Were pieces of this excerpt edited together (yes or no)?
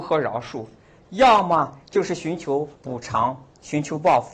yes